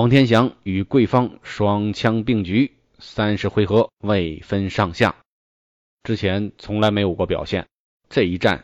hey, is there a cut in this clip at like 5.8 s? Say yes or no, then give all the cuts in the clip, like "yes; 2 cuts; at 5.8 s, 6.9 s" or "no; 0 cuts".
yes; 1 cut; at 5.8 s